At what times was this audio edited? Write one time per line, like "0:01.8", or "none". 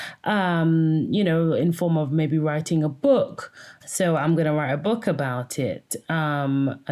0:03.8